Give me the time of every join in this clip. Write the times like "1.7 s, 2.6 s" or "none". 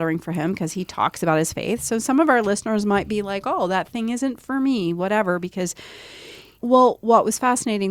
6.6 s